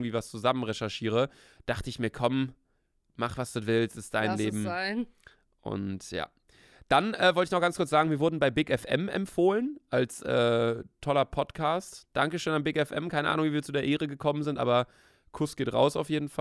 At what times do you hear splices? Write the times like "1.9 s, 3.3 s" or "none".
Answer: none